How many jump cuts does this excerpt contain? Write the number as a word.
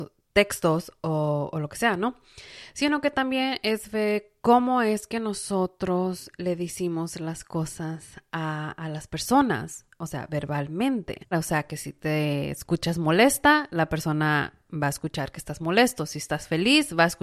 one